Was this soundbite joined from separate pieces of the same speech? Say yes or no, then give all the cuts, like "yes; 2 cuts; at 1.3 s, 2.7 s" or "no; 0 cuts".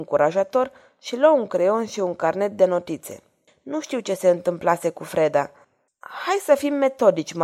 yes; 2 cuts; at 3.5 s, 5.9 s